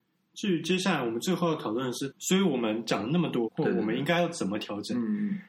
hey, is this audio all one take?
no; 2 cuts; at 2.1 s, 3.5 s

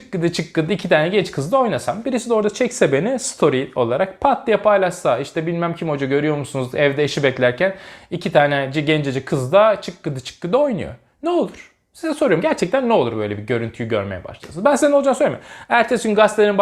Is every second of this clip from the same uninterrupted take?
yes; 0 cuts

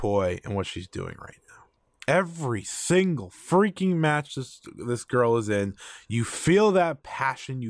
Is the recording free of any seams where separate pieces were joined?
yes; 0 cuts

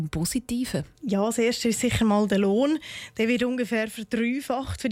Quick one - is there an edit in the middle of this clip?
yes; 1 cut; at 0.9 s

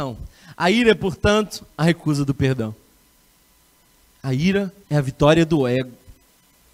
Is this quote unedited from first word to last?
no; 2 cuts; at 1.7 s, 4.8 s

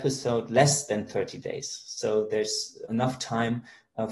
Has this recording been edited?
yes; 1 cut; at 2.9 s

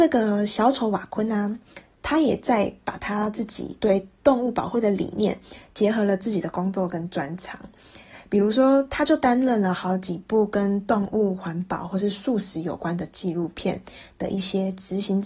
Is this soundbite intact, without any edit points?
yes; 0 cuts

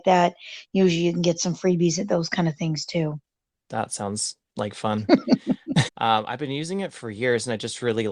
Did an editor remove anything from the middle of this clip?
yes; 2 cuts; at 3.5 s, 5.9 s

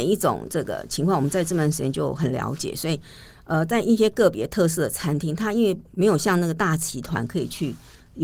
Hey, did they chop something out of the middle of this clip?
no; 0 cuts

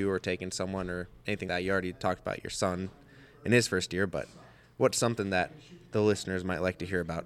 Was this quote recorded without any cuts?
no; 1 cut; at 1.5 s

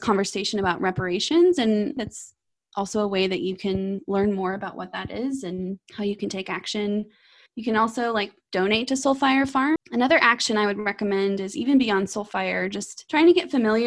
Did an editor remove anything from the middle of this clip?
yes; 2 cuts; at 2.0 s, 9.8 s

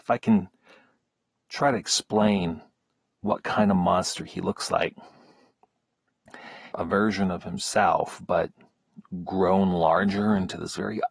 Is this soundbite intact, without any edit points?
no; 1 cut; at 6.7 s

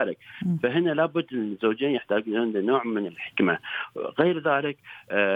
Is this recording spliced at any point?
no; 0 cuts

